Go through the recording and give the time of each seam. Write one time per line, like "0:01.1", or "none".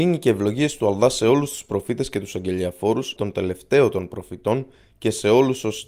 0:03.2